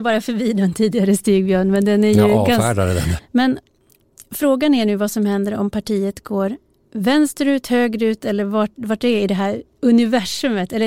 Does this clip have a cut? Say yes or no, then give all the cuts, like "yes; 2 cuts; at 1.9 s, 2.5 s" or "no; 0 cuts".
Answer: yes; 1 cut; at 3.2 s